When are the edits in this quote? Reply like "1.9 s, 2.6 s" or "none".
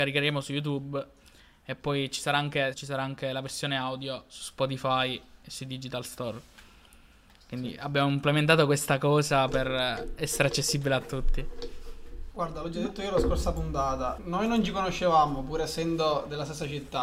2.7 s, 12.3 s, 14.2 s